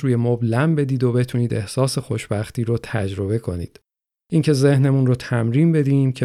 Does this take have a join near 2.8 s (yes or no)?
no